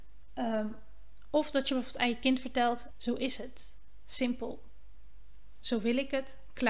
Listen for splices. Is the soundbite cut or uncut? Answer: cut